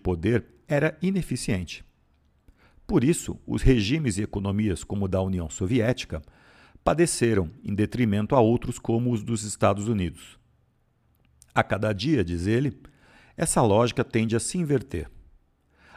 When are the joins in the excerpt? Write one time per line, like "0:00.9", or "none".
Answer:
none